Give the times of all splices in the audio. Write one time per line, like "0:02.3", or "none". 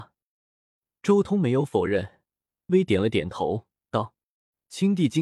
0:02.7